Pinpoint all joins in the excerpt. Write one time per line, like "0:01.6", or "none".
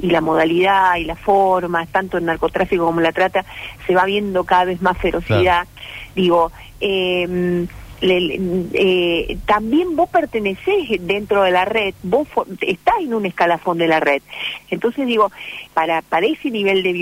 0:14.6
0:15.7